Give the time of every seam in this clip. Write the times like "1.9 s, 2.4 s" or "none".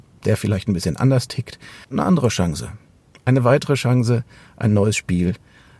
none